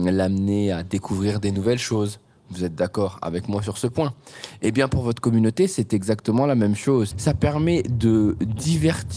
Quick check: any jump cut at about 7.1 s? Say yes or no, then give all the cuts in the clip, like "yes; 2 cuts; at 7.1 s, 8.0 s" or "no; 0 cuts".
yes; 1 cut; at 7.1 s